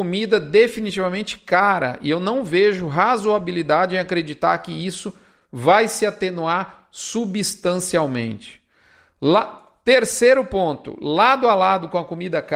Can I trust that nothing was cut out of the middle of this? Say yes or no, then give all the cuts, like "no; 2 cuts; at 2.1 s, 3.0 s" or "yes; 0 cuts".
yes; 0 cuts